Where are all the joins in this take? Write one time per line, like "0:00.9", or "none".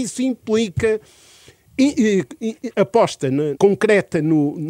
0:03.6

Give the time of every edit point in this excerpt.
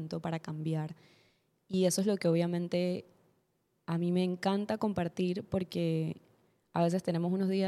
none

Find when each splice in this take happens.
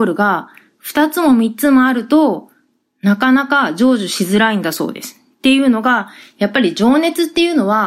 none

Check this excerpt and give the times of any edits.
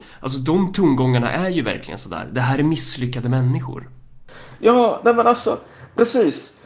none

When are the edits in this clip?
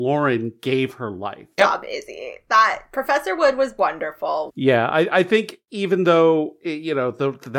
0:01.6
0:04.5

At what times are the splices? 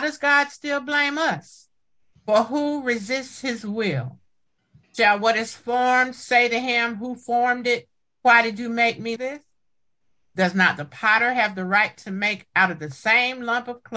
0:04.8
0:09.2

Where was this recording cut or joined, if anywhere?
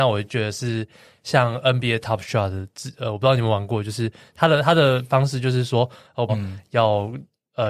0:06.3

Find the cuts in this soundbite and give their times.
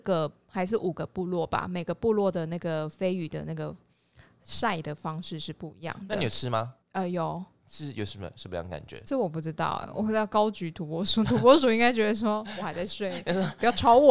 0:06.8
0:09.1

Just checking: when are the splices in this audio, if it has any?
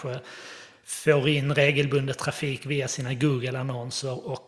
none

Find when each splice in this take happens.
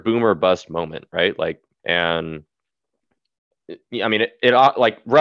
0:01.8

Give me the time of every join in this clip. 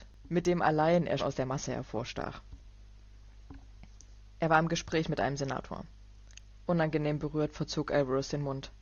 0:01.2

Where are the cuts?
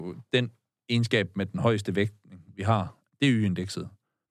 none

